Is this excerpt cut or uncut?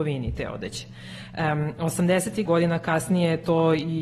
cut